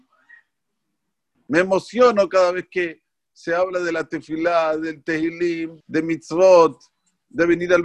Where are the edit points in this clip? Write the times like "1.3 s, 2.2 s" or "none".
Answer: 1.3 s, 5.8 s

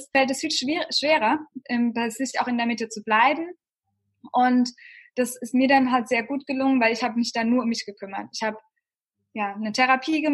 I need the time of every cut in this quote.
none

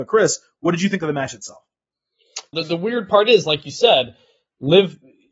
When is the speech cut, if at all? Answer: 2.5 s

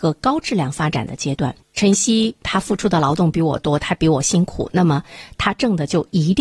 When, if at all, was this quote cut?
1.6 s

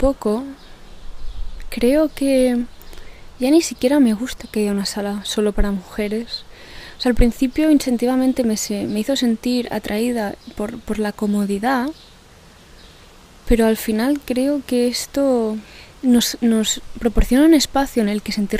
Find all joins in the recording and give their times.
none

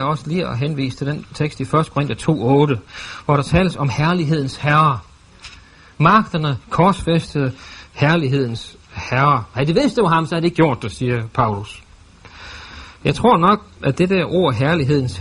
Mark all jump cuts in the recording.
none

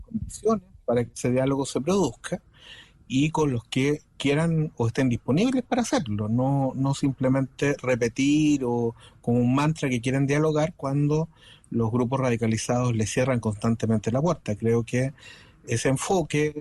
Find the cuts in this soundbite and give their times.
none

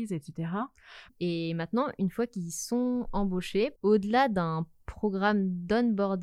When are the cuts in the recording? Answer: 1.1 s, 3.8 s

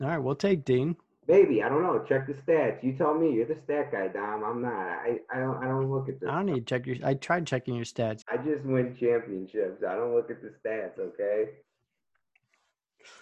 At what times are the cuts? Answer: 8.2 s

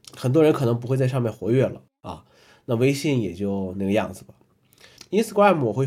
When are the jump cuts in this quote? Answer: 5.0 s

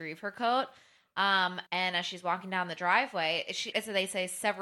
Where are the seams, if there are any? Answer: 1.7 s, 3.7 s

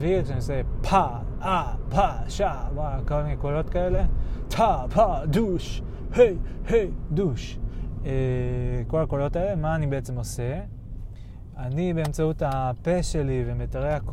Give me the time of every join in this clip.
6.0 s

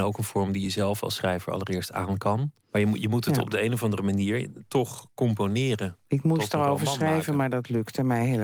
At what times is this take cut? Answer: 2.6 s

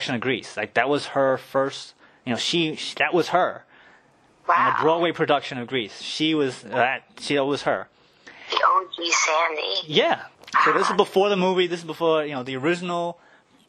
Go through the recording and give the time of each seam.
10.3 s

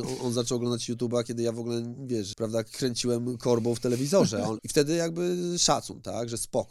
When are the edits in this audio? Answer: 2.3 s, 4.6 s

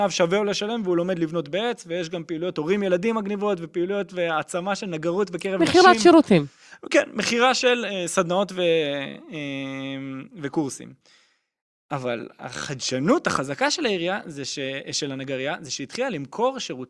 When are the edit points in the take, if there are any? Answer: none

